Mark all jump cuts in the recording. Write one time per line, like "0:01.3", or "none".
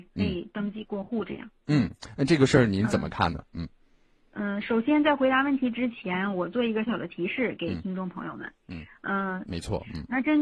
0:06.9
0:09.4